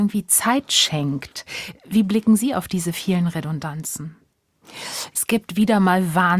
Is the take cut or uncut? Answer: cut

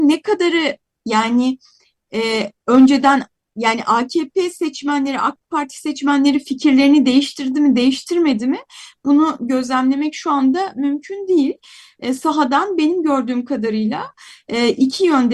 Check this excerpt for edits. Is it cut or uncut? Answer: uncut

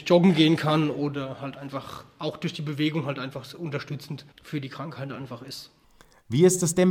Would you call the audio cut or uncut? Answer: cut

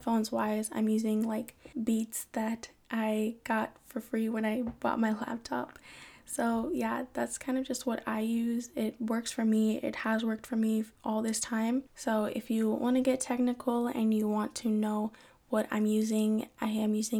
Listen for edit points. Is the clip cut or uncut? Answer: cut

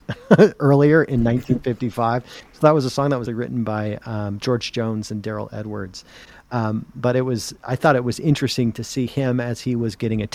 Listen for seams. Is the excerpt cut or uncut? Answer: cut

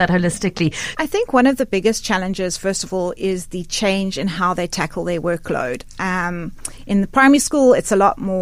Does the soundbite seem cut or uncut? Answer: cut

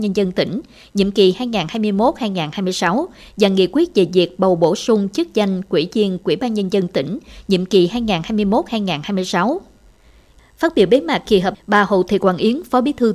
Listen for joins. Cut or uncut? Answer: cut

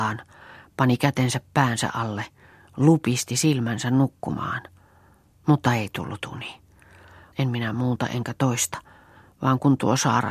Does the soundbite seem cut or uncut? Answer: cut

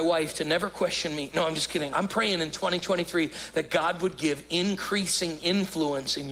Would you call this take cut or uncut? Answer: cut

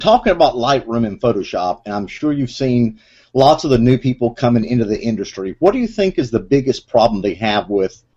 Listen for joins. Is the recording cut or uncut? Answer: uncut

